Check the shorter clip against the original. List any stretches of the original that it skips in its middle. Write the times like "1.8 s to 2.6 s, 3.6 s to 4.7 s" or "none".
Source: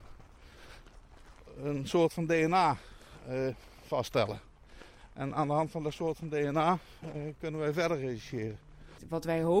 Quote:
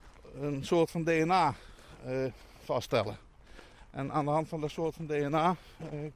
none